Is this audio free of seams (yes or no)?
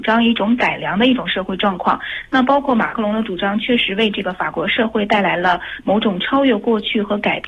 yes